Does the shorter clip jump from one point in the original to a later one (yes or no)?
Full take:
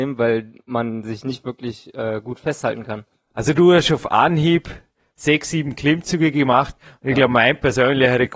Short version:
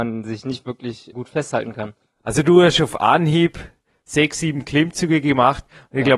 yes